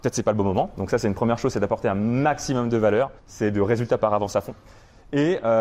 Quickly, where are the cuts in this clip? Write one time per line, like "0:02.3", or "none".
0:03.2